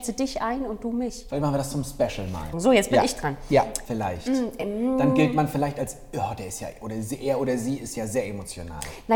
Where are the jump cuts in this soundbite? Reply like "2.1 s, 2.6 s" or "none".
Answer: 2.5 s, 3.8 s

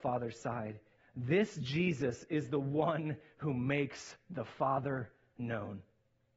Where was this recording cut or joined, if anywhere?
1.0 s

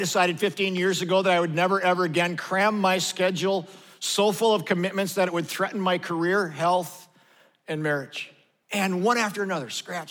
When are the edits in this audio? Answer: 8.6 s

